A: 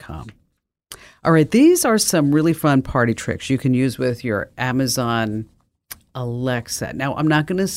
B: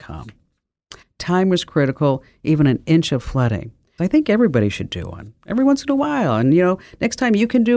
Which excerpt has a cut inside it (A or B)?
B